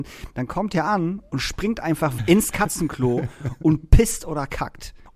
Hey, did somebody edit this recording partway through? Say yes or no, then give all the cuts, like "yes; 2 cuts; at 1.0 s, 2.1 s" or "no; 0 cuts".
yes; 1 cut; at 2.2 s